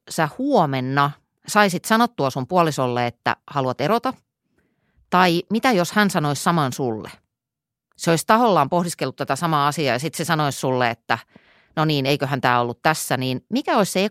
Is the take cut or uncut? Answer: uncut